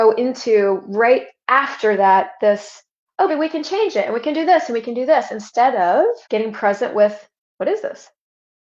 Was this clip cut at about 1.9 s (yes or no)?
no